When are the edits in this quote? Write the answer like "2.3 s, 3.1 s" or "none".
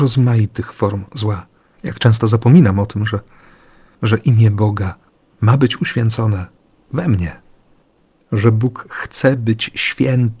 1.8 s